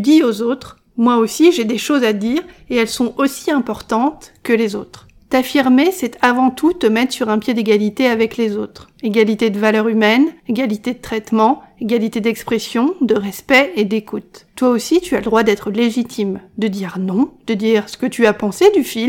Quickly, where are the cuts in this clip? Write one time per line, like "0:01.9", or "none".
none